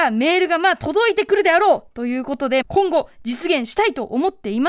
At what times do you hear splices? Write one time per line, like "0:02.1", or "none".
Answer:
0:02.6